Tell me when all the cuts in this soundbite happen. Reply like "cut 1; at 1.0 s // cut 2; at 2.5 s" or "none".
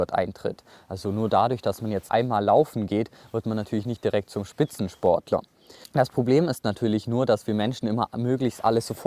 cut 1; at 2.1 s // cut 2; at 5.8 s